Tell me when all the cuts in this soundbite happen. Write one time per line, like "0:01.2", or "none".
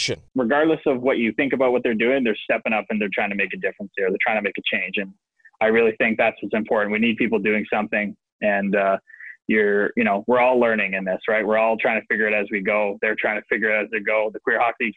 none

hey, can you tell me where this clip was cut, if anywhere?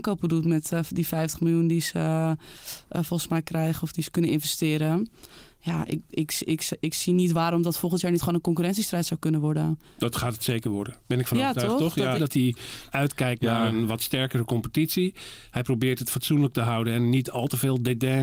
0:12.2

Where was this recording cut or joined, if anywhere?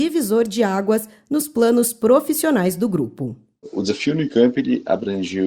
none

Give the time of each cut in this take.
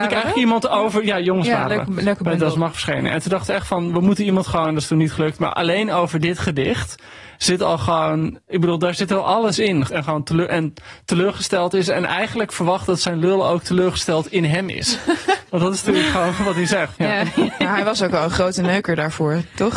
0:09.9
0:17.0

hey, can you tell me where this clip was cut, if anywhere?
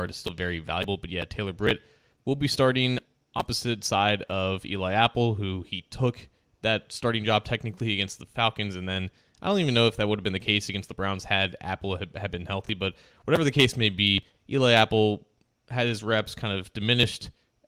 none

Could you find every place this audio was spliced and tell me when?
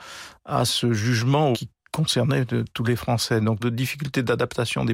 0:01.5
0:03.6

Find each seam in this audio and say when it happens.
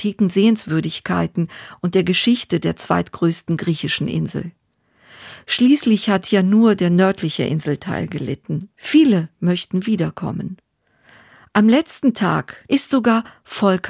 0:08.7

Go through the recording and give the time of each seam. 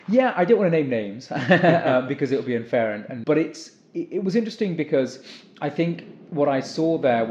0:03.2

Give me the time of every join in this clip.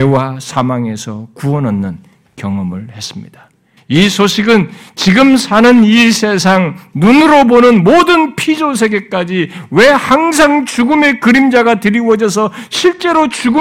0:03.8

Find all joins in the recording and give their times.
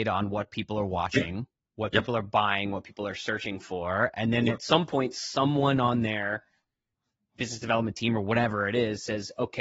none

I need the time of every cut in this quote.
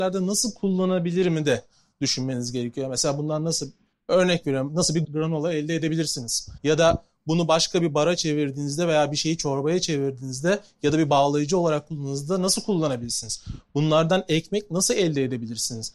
0:05.0

